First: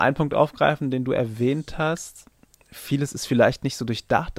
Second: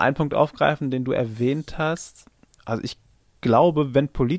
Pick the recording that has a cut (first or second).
second